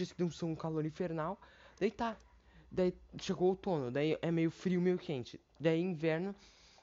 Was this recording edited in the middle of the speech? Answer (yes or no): no